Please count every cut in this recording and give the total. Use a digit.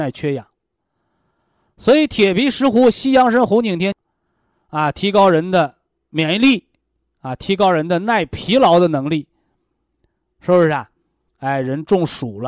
0